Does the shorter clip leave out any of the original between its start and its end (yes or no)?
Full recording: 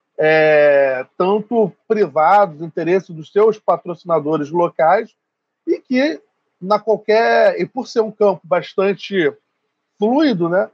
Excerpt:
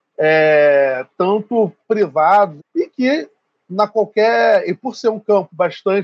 yes